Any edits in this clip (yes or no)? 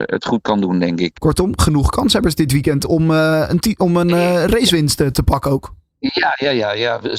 yes